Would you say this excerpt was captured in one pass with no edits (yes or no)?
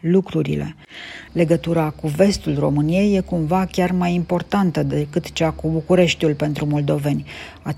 no